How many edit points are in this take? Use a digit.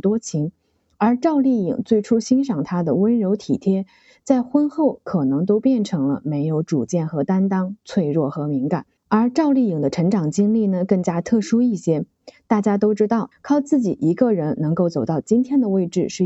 2